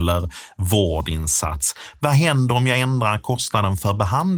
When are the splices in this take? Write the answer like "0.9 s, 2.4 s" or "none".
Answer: none